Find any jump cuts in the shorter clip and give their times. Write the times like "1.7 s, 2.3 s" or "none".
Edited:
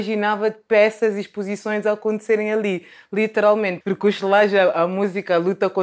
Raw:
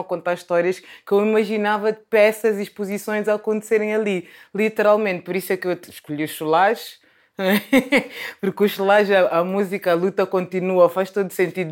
3.8 s